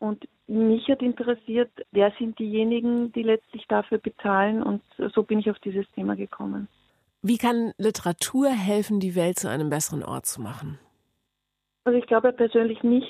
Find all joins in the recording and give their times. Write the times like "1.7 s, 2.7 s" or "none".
none